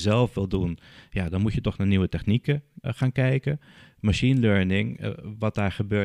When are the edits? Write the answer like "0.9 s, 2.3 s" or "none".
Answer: 2.8 s